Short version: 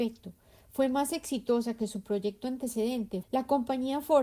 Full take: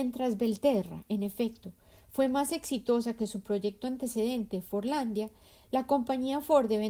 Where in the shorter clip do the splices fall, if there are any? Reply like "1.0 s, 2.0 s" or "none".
3.2 s